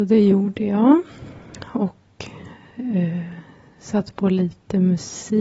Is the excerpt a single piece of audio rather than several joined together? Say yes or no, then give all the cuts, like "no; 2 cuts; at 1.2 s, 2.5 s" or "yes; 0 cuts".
yes; 0 cuts